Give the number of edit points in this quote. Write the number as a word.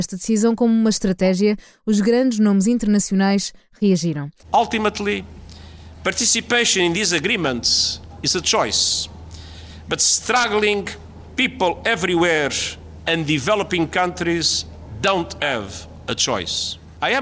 one